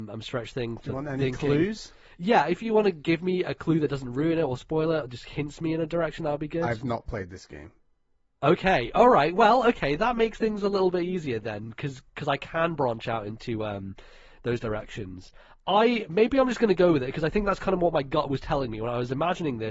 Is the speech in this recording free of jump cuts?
yes; 0 cuts

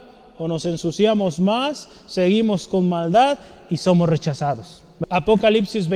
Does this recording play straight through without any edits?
no; 1 cut; at 5.0 s

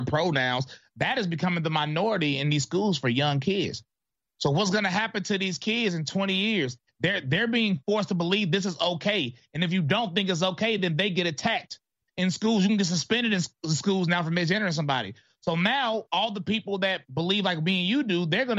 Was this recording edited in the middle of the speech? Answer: no; 0 cuts

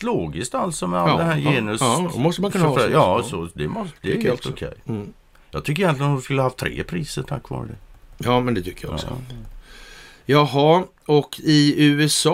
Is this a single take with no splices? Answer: yes; 0 cuts

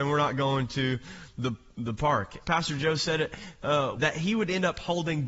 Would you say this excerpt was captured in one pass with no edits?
no; 2 cuts; at 2.4 s, 4.0 s

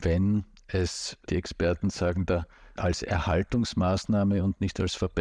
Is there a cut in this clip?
yes; 2 cuts; at 1.3 s, 2.8 s

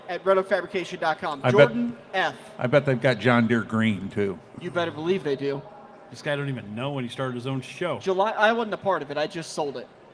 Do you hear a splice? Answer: yes; 1 cut; at 6.1 s

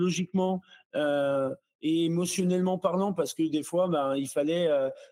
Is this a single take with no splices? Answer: yes; 0 cuts

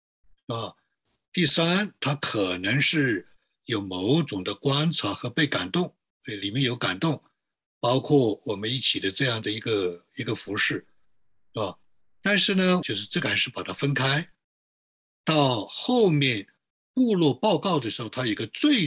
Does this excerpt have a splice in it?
yes; 1 cut; at 12.8 s

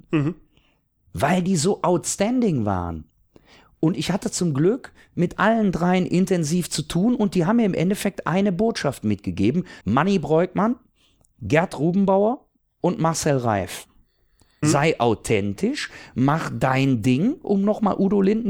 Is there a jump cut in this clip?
yes; 2 cuts; at 9.8 s, 14.6 s

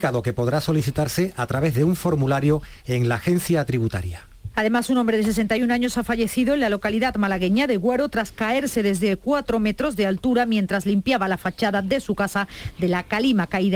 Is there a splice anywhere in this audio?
yes; 1 cut; at 4.5 s

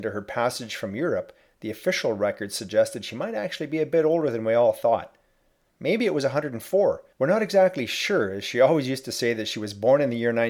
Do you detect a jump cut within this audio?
yes; 2 cuts; at 5.7 s, 7.1 s

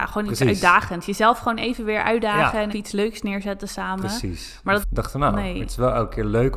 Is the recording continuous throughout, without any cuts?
no; 2 cuts; at 2.7 s, 4.8 s

